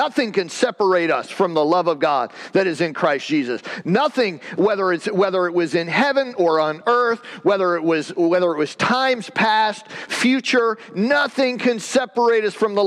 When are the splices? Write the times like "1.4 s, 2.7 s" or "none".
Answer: none